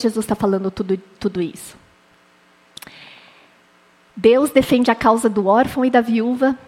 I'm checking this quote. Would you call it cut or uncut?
uncut